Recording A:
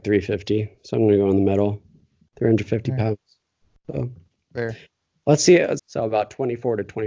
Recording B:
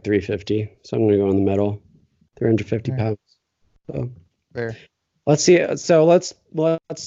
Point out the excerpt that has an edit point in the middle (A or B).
A